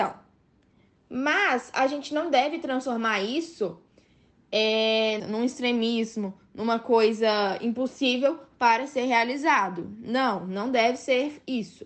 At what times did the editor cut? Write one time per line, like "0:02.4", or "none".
0:05.2

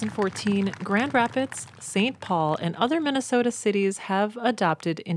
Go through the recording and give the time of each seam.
0:01.7

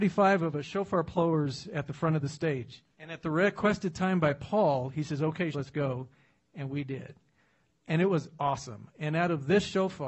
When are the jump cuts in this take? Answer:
0:02.9
0:05.5

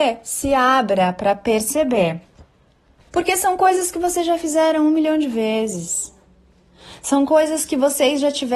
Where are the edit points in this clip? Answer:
0:03.1

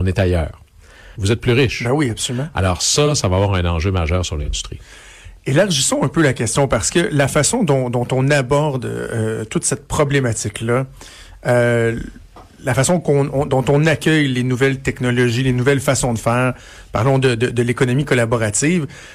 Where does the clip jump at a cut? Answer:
0:01.2

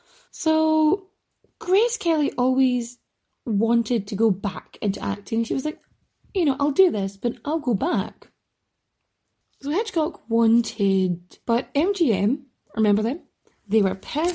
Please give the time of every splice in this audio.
0:11.4

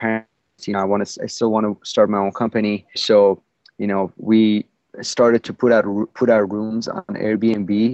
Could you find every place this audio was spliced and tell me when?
0:02.9

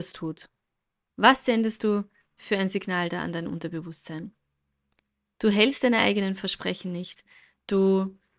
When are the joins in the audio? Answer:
0:01.1

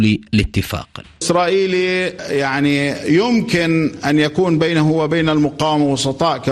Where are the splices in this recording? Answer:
0:01.0

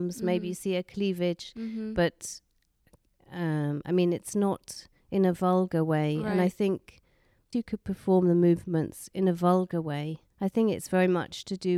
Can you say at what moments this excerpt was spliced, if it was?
0:07.5
0:10.3

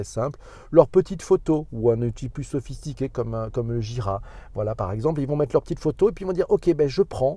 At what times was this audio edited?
none

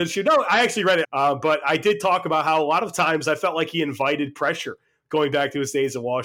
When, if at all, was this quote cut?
0:01.0

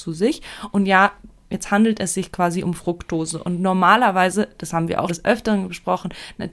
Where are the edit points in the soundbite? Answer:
0:05.1

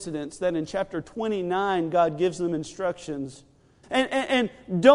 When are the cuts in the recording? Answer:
0:03.8

